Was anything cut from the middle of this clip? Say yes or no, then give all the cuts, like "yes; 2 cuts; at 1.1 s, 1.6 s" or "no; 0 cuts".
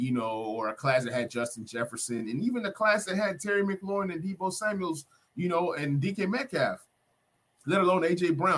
no; 0 cuts